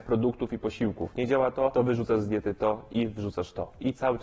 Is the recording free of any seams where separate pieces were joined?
yes; 0 cuts

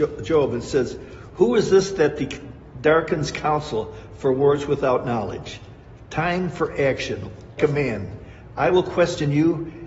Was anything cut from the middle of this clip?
yes; 1 cut; at 7.6 s

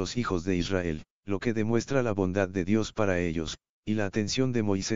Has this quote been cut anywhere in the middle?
yes; 1 cut; at 1.1 s

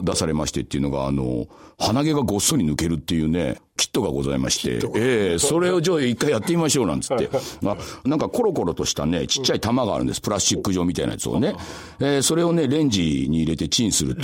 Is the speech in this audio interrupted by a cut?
yes; 2 cuts; at 3.6 s, 7.7 s

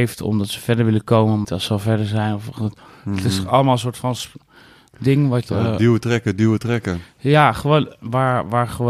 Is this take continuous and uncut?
no; 1 cut; at 1.4 s

